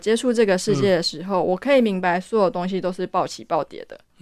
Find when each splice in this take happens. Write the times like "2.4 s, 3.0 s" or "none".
none